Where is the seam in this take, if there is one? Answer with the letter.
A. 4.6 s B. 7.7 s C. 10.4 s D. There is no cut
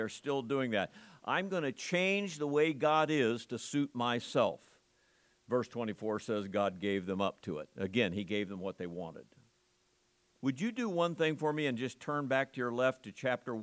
C